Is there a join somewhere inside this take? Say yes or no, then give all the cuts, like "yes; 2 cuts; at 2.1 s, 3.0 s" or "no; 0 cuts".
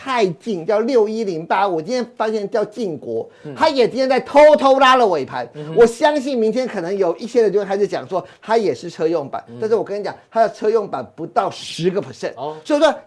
no; 0 cuts